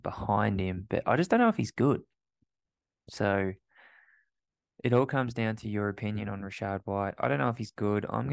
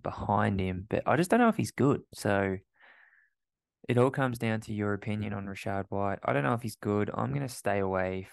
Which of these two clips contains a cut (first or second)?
second